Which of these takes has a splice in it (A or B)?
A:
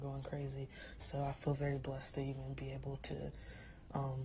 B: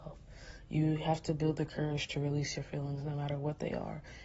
A